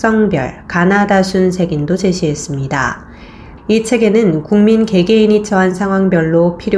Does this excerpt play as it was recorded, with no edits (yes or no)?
no